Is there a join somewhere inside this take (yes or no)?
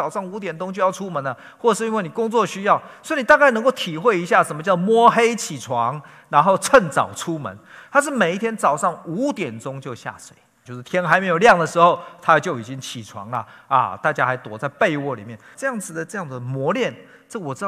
yes